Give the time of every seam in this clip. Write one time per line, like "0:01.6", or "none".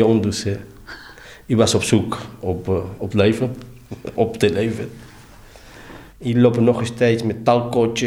0:04.1
0:06.1